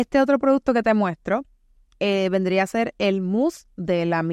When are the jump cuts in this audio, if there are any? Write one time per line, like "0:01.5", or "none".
none